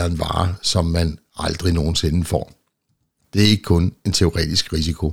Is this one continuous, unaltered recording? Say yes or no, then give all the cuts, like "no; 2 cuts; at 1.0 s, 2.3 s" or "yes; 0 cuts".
no; 1 cut; at 3.2 s